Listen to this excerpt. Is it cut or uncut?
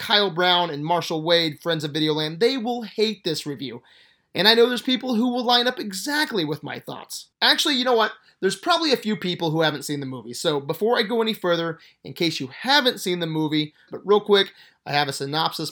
cut